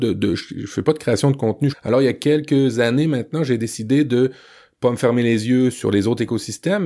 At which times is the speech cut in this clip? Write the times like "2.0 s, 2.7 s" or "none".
1.7 s